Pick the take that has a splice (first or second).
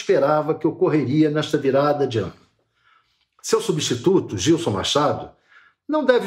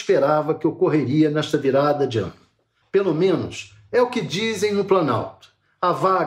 second